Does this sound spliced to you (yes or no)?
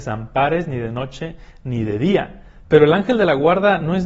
yes